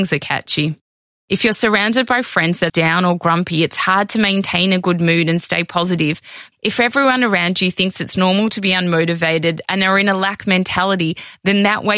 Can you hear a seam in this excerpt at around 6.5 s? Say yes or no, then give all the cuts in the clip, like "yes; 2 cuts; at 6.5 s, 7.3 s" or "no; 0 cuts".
yes; 2 cuts; at 2.7 s, 6.5 s